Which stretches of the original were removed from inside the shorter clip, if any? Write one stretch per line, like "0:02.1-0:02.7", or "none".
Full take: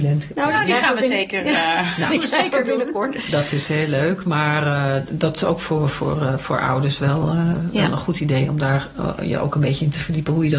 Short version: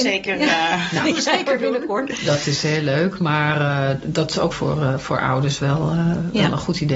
0:05.6-0:05.9